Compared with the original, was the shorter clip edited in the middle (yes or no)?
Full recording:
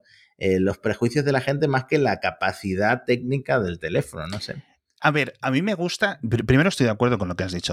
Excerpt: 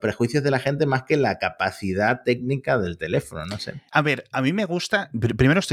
yes